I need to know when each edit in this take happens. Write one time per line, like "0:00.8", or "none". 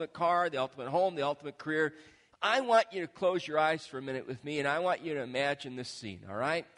0:02.3

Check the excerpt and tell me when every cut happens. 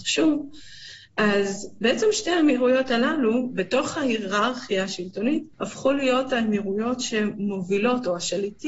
0:05.5

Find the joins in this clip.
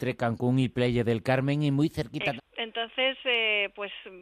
0:02.4

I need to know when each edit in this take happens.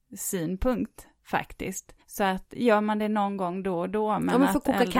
0:02.0

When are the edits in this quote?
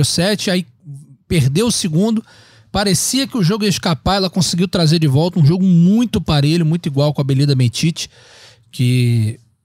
none

